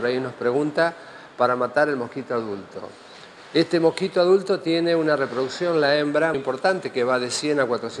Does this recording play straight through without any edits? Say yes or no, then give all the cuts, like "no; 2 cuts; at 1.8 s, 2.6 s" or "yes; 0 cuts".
no; 1 cut; at 6.3 s